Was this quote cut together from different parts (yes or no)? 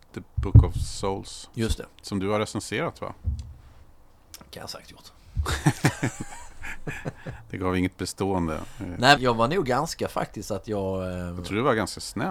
yes